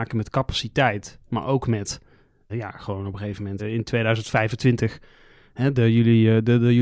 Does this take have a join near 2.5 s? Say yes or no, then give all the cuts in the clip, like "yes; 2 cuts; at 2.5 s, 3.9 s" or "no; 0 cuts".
yes; 2 cuts; at 2.5 s, 3.6 s